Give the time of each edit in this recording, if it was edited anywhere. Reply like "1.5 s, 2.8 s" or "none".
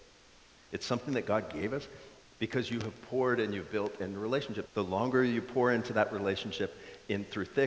2.2 s, 4.7 s